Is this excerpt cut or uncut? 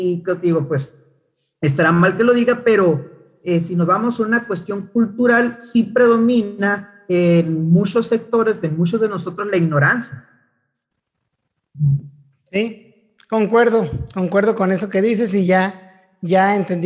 uncut